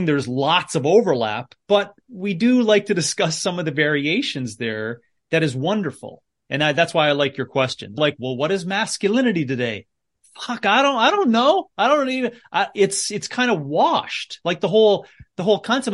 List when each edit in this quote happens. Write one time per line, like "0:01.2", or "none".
0:01.6
0:08.0